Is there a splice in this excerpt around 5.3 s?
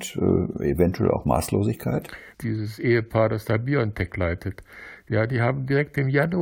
no; 1 cut; at 2.3 s

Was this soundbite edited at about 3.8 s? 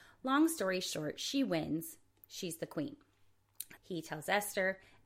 yes; 1 cut; at 3.8 s

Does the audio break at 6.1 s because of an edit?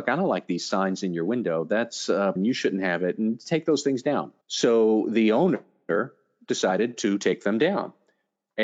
no; 2 cuts; at 2.4 s, 4.4 s

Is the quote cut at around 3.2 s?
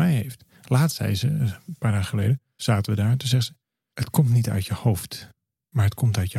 no; 0 cuts

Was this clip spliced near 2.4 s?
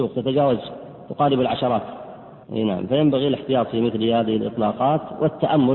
yes; 1 cut; at 2.4 s

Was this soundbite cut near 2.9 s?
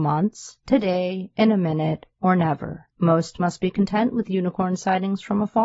yes; 1 cut; at 2.9 s

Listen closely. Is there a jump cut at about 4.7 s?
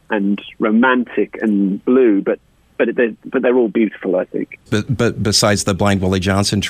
yes; 1 cut; at 4.7 s

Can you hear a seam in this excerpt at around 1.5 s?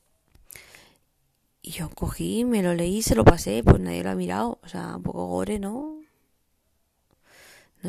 no; 1 cut; at 4.9 s

